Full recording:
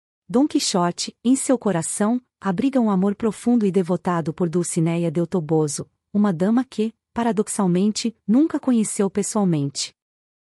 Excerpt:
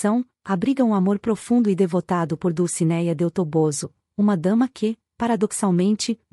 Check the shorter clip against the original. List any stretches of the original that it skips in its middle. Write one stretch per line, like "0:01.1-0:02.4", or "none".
none